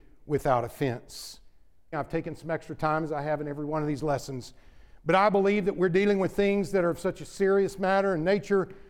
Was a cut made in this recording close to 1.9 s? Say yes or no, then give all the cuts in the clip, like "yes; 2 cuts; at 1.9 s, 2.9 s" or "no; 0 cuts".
yes; 1 cut; at 1.9 s